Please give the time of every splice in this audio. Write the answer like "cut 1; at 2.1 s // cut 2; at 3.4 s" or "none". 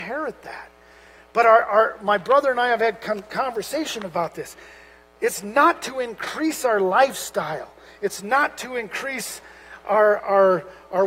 none